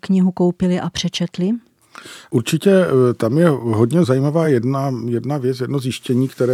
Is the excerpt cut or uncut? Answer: uncut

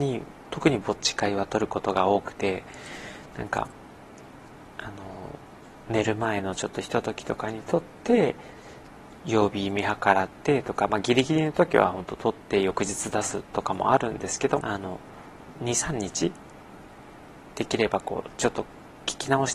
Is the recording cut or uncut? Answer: cut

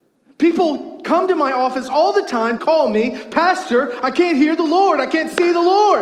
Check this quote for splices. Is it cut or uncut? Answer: cut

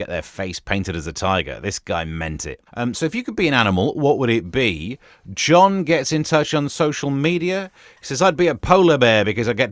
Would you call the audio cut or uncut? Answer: cut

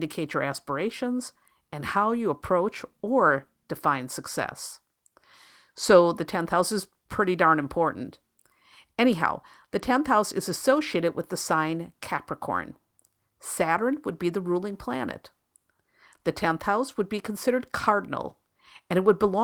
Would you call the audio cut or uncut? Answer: uncut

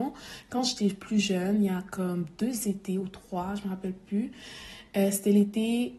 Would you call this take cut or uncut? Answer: uncut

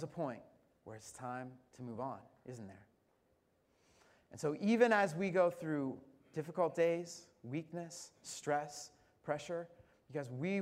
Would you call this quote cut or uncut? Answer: uncut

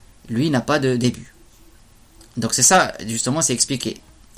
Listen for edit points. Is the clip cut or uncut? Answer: uncut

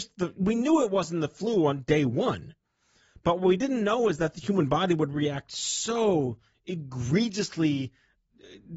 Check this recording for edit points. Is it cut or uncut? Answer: uncut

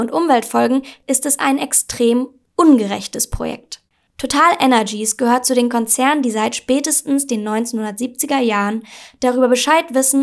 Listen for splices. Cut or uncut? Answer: cut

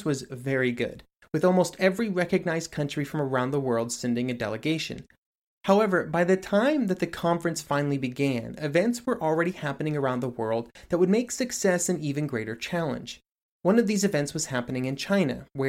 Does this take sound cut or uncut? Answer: uncut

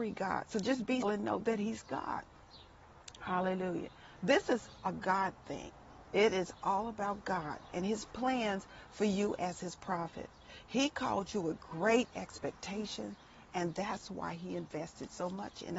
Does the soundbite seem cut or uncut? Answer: cut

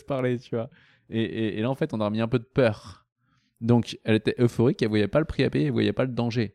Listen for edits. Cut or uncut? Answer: uncut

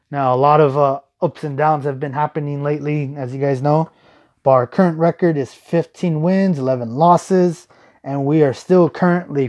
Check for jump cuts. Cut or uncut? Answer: uncut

